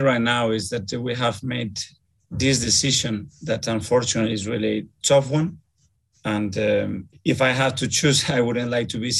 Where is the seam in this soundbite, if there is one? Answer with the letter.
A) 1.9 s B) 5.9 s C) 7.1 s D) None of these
C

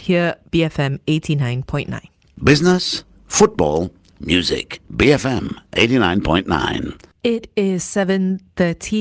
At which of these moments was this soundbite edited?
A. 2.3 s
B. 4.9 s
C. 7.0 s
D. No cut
B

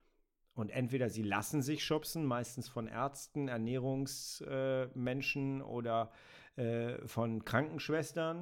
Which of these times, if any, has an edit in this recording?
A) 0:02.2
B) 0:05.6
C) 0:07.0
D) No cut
D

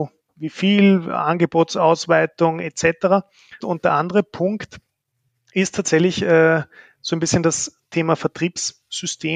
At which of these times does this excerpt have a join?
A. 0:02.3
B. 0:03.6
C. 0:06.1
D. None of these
B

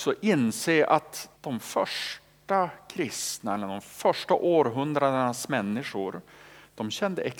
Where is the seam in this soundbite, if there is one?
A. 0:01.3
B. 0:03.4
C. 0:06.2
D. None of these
A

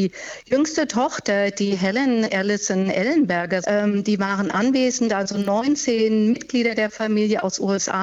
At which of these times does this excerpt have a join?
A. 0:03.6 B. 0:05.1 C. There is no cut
A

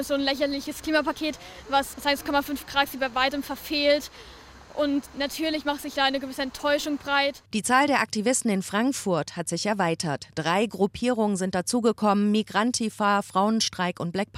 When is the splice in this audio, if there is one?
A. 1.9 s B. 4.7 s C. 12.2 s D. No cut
A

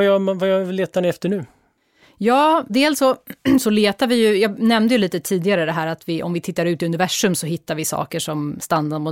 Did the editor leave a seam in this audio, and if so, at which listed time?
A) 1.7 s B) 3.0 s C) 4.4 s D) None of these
D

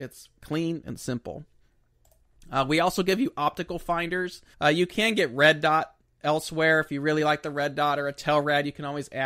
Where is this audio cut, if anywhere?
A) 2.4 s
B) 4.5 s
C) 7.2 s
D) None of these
B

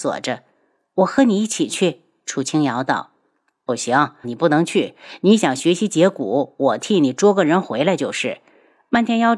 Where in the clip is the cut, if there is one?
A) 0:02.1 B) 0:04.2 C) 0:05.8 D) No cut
B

